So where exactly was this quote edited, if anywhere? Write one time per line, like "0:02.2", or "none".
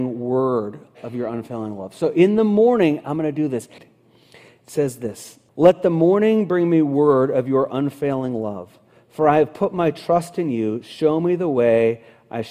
0:03.8
0:05.5